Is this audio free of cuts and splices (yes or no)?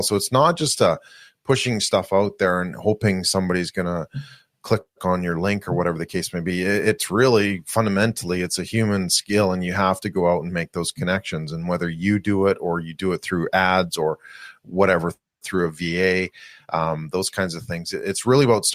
yes